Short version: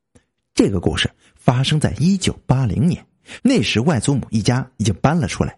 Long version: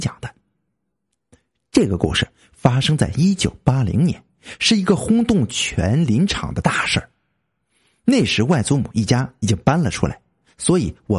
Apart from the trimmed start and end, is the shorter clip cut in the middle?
yes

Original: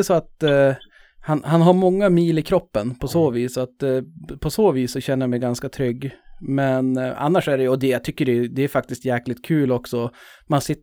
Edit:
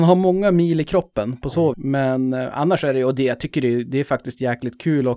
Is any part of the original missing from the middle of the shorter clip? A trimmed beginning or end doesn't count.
yes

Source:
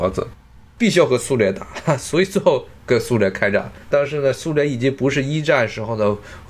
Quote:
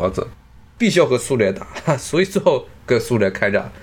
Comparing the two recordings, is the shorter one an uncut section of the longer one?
yes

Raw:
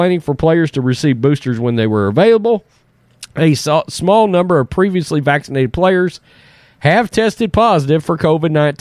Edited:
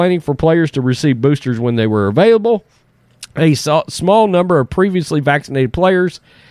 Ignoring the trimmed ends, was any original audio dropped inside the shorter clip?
no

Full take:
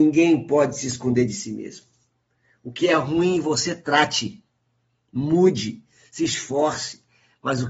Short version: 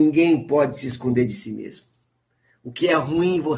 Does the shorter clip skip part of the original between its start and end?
no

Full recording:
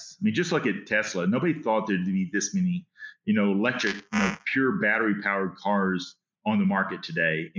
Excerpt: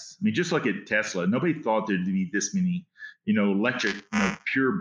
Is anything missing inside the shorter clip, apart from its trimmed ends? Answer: no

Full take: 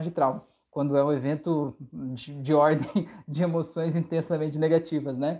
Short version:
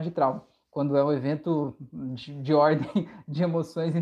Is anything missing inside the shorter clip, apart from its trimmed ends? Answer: no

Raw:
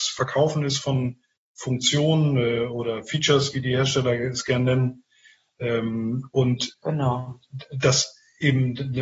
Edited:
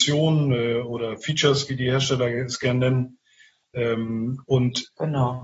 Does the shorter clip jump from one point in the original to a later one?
no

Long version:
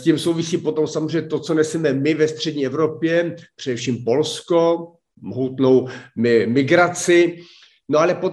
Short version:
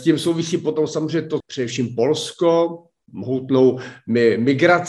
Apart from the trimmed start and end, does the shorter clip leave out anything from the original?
yes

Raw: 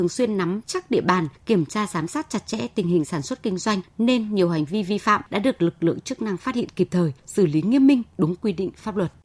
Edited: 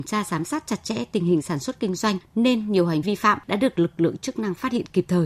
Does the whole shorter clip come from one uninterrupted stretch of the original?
no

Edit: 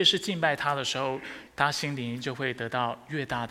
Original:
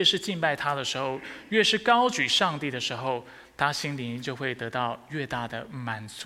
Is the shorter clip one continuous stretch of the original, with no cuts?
no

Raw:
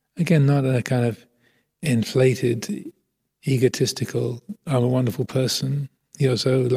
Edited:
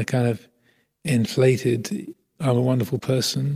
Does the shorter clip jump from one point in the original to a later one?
yes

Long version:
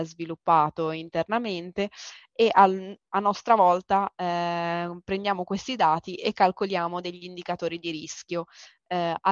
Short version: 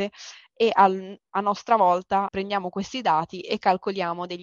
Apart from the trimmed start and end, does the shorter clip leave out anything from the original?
yes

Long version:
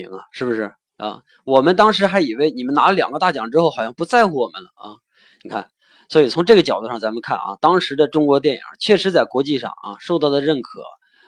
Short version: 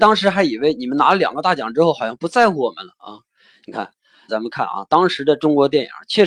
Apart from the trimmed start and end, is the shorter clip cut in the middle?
yes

